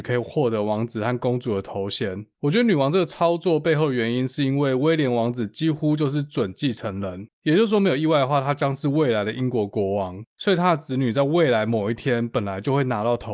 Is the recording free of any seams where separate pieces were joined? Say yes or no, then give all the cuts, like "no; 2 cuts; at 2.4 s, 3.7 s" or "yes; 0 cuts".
yes; 0 cuts